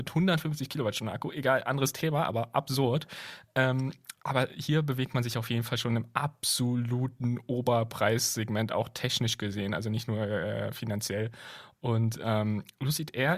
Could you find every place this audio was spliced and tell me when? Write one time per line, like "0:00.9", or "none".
none